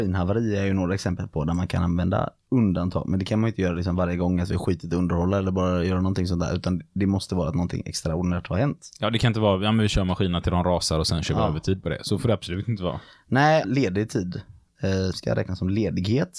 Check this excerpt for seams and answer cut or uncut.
cut